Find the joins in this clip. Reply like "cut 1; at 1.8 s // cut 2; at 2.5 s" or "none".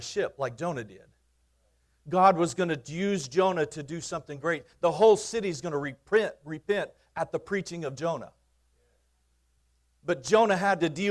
none